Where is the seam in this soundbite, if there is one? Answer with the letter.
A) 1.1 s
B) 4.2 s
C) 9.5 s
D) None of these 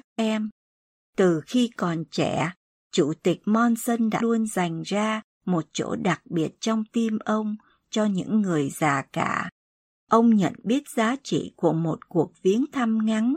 B